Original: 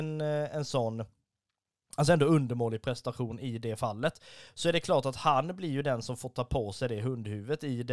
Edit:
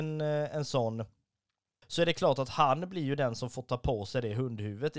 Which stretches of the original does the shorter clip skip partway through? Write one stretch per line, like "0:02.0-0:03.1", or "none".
0:01.8-0:04.5